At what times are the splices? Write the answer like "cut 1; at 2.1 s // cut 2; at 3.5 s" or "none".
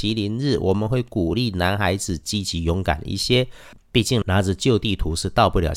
cut 1; at 3.8 s